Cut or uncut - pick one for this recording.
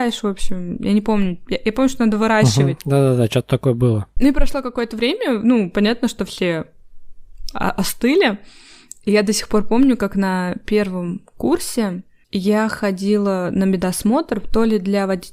uncut